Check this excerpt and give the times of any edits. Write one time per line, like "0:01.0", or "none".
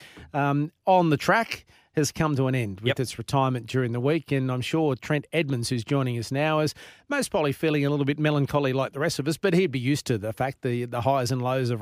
none